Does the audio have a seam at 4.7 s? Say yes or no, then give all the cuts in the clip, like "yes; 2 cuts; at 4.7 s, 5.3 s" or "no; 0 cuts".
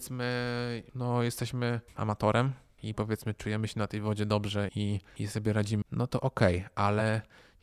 yes; 2 cuts; at 4.7 s, 5.8 s